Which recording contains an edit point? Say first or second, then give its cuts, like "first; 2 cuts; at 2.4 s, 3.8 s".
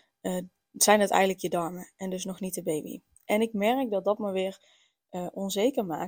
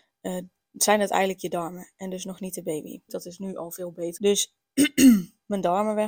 second; 2 cuts; at 3.1 s, 4.2 s